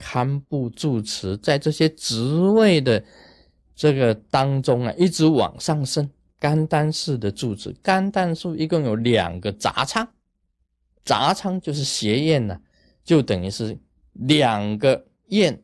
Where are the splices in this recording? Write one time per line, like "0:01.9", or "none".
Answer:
0:06.3